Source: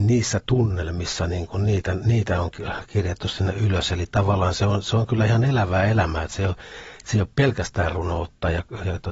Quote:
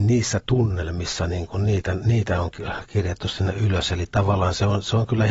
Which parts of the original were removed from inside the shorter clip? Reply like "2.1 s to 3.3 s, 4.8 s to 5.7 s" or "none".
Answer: none